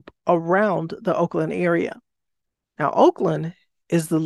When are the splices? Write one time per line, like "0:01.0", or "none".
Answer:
0:02.6